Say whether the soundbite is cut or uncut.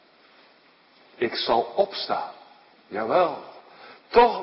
cut